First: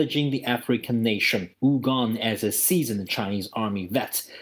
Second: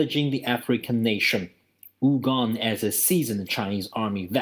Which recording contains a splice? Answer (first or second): first